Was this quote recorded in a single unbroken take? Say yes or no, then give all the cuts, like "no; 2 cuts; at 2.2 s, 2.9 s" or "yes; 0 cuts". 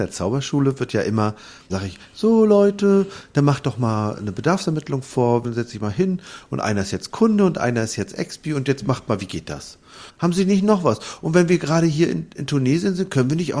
no; 3 cuts; at 1.7 s, 5.4 s, 10.1 s